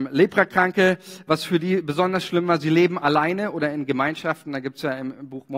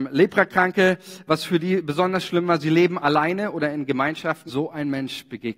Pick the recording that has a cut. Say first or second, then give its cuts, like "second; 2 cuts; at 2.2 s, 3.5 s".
second; 1 cut; at 4.5 s